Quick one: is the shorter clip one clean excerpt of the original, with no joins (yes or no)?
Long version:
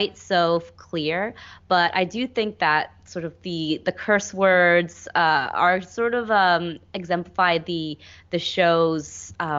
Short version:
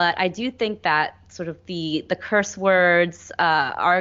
yes